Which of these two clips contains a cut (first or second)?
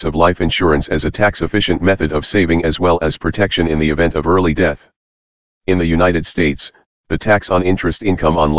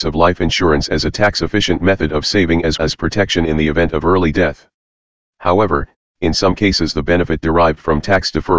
second